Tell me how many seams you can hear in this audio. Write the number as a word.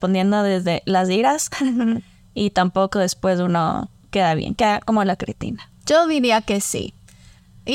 two